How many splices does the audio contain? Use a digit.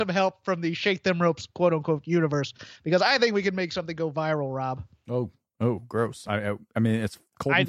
0